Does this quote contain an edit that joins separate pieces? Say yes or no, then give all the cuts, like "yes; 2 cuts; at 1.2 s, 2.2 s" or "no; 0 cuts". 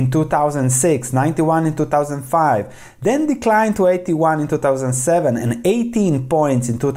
no; 0 cuts